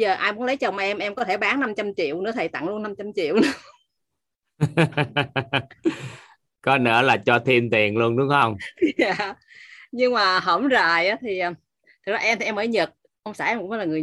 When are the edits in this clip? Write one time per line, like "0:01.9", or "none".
none